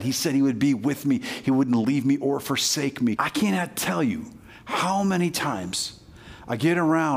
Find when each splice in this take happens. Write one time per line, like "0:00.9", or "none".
0:03.2